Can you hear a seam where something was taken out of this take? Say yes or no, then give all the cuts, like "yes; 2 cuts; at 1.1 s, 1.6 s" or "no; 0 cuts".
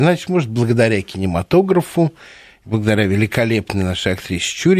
no; 0 cuts